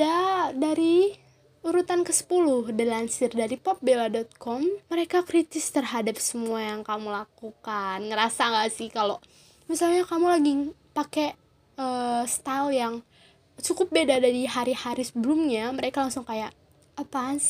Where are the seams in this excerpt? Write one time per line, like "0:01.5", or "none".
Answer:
0:04.8